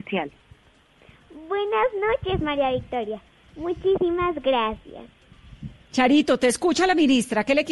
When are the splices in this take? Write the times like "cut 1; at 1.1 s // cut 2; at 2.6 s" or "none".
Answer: none